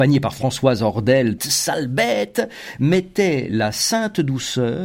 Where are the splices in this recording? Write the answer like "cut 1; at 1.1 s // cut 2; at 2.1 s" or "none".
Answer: cut 1; at 1.4 s

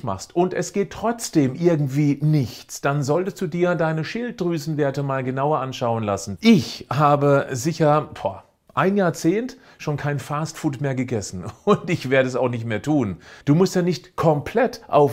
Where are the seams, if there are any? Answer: cut 1; at 6.4 s // cut 2; at 13.4 s

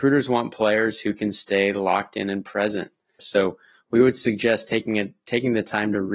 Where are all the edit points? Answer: cut 1; at 3.2 s

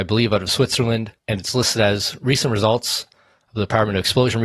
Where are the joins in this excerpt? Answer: cut 1; at 1.2 s

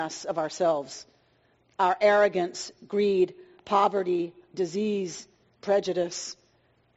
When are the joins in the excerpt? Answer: none

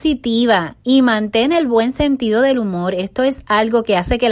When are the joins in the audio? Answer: none

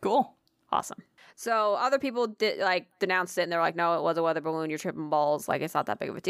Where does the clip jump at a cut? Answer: none

